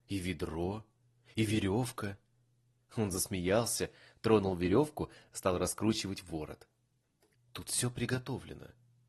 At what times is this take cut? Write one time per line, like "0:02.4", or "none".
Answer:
0:07.4

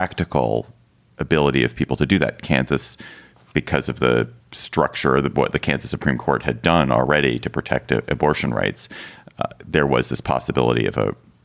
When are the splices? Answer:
0:02.4
0:04.4

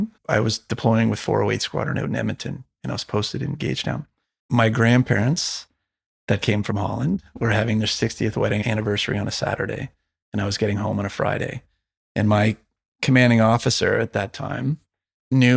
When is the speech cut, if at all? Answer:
0:04.4

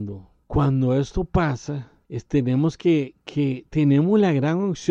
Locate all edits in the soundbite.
none

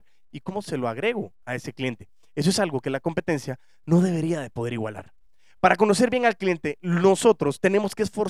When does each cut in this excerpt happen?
none

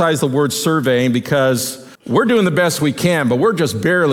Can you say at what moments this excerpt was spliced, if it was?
0:02.0

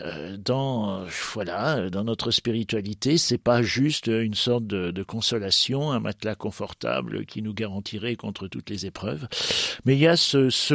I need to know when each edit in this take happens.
none

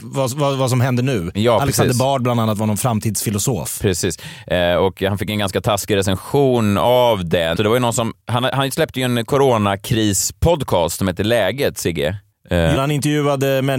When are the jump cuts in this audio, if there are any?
0:07.6
0:12.8

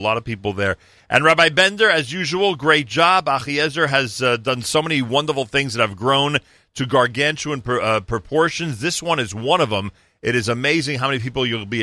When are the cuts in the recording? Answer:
none

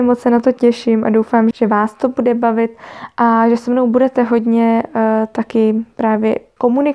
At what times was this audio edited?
0:01.5

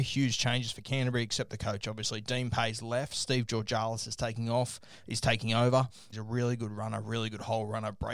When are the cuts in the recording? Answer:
0:06.1

